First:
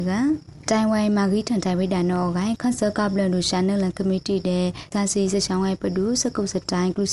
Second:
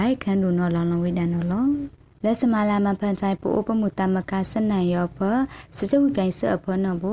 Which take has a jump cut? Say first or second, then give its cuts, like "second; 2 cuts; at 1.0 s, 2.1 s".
first; 1 cut; at 4.9 s